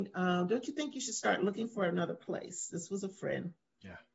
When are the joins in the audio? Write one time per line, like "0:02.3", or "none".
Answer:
none